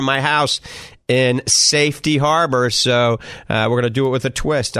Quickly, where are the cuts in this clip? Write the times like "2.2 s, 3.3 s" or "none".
none